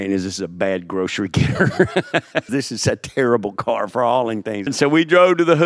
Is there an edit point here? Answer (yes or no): yes